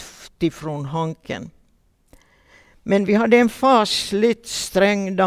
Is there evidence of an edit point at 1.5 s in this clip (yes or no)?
no